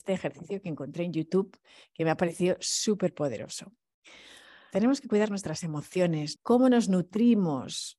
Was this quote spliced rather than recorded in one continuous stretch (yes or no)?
yes